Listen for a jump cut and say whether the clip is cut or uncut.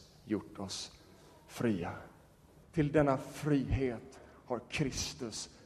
cut